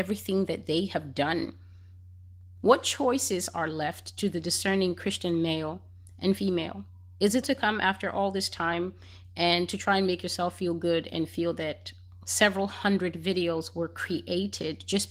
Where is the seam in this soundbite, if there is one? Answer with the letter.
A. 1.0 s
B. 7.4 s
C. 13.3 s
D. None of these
B